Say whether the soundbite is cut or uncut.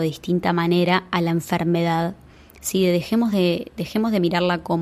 uncut